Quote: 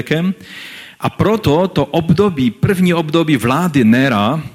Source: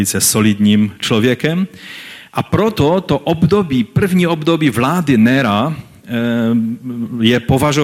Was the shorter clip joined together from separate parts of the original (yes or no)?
no